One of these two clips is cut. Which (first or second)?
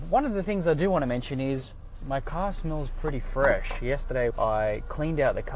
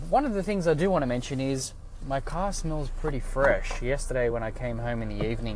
first